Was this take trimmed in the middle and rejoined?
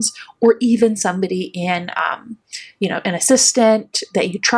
no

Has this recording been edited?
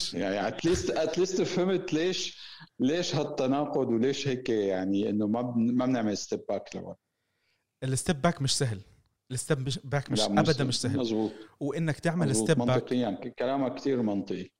no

